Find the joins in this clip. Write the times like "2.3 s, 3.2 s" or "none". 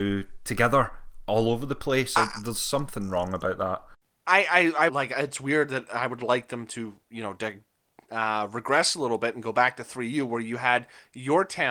4.9 s

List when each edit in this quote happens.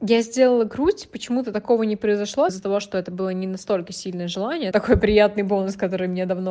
2.5 s, 4.7 s

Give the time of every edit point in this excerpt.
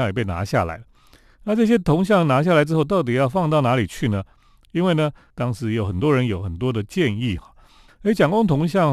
5.3 s, 7.9 s

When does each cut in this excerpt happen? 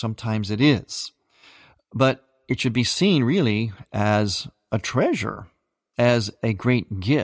none

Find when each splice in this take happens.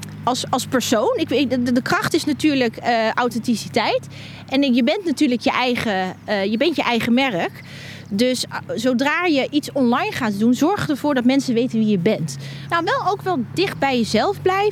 12.7 s

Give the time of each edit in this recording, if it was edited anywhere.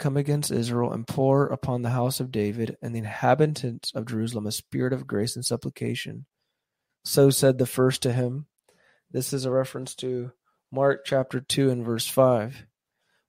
6.9 s

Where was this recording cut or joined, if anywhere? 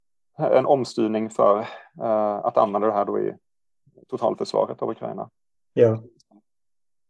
none

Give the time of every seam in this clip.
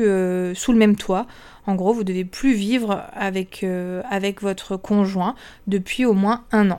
none

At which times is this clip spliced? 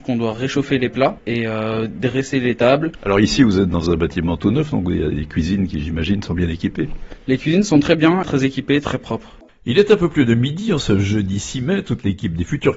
none

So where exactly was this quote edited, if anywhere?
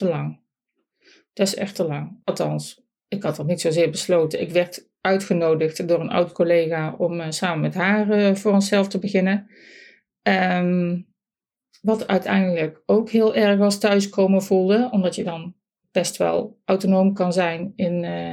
2.2 s

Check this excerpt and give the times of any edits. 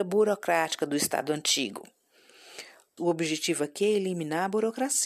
3.0 s

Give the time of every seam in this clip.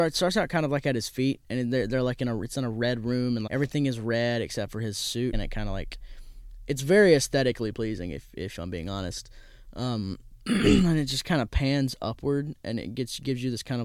3.5 s, 5.3 s

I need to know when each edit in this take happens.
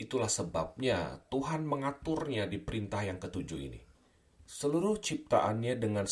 4.4 s

